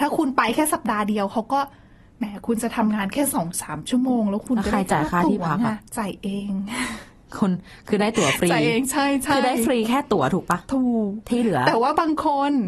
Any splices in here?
yes; 1 cut; at 5.9 s

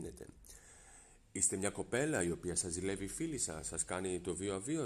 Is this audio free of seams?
yes; 0 cuts

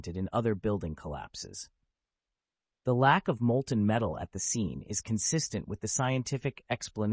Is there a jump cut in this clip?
yes; 1 cut; at 2.7 s

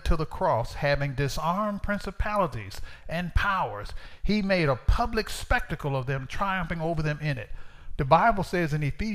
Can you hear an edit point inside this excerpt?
yes; 1 cut; at 8.0 s

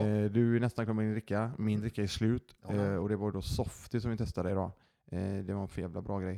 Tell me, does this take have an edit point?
no; 0 cuts

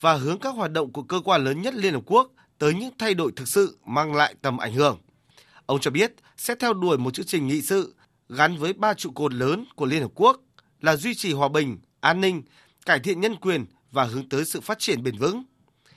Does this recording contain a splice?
no; 0 cuts

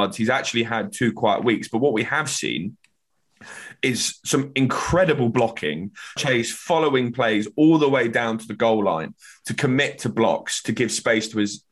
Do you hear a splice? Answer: yes; 1 cut; at 6.2 s

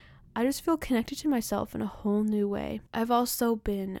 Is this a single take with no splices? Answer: no; 1 cut; at 2.9 s

